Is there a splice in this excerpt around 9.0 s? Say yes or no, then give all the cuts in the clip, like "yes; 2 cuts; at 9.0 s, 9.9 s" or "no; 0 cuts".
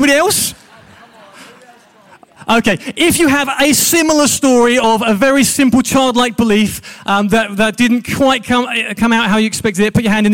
no; 0 cuts